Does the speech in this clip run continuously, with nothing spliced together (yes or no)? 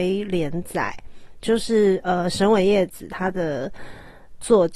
yes